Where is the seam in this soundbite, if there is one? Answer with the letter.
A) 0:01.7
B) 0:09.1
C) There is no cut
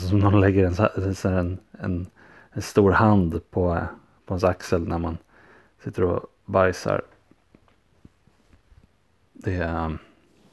C